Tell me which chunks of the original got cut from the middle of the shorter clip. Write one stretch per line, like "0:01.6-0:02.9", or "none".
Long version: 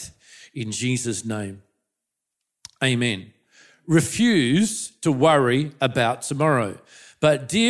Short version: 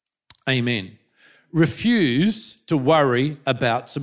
none